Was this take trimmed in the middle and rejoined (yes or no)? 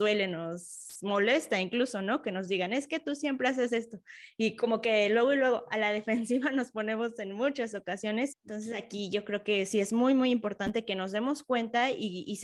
yes